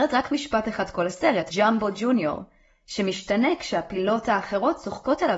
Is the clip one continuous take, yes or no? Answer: no